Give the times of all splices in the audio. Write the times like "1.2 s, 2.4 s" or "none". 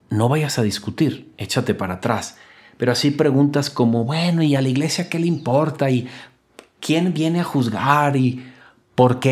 none